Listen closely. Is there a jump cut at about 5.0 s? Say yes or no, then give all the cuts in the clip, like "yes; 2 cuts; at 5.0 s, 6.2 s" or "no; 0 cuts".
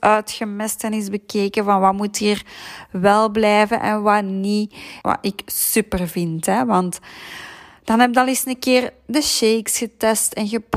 yes; 1 cut; at 5.0 s